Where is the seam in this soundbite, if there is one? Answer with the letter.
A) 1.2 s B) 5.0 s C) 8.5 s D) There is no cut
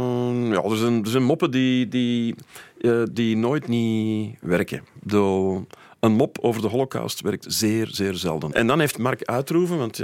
C